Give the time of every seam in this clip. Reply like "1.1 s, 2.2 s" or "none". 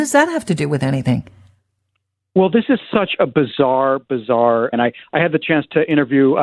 4.7 s